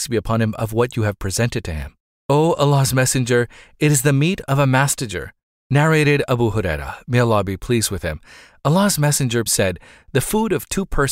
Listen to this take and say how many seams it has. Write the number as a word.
two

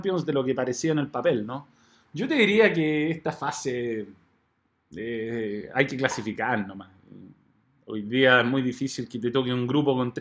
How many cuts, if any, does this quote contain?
one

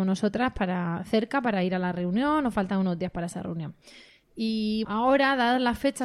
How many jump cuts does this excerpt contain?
one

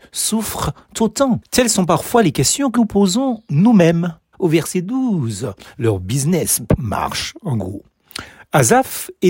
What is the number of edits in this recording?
two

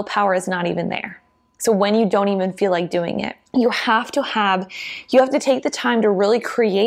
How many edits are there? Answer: one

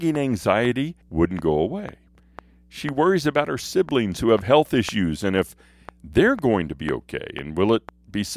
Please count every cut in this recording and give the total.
one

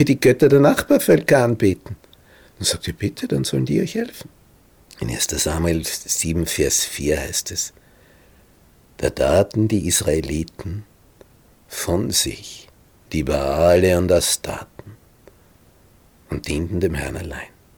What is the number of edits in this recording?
one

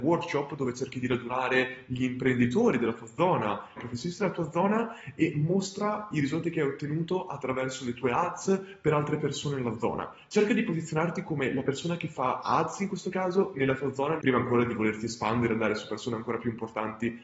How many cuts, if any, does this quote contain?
two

